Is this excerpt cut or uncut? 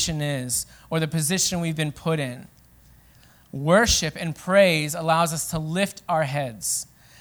uncut